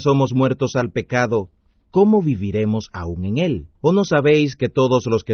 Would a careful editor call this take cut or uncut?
cut